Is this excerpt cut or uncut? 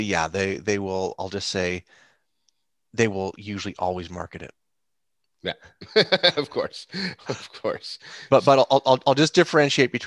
uncut